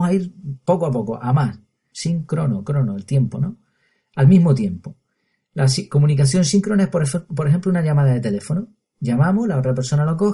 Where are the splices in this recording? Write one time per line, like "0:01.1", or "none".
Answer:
0:01.9